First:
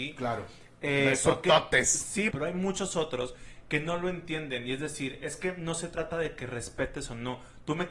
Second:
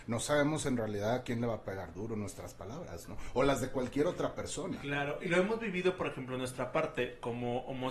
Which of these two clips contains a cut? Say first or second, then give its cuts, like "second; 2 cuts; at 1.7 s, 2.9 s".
first; 1 cut; at 2.3 s